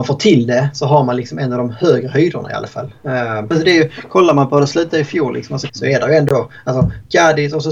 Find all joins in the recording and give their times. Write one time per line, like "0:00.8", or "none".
0:03.5
0:05.7